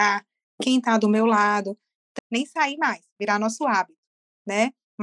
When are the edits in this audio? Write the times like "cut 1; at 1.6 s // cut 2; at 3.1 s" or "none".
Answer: cut 1; at 2.2 s